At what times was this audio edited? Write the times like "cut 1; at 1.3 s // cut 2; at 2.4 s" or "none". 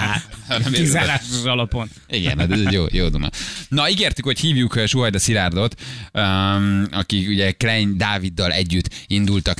none